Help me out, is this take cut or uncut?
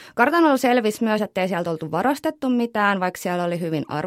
uncut